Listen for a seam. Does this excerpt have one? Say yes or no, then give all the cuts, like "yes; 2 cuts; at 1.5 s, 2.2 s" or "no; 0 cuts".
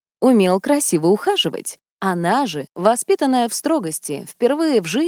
yes; 1 cut; at 1.8 s